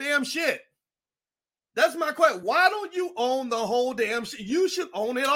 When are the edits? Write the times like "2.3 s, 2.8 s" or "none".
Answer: none